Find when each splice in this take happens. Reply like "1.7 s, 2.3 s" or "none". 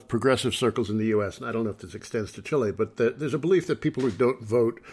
none